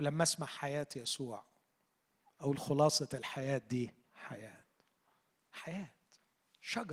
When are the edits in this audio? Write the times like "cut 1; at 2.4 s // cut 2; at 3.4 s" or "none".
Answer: cut 1; at 4.0 s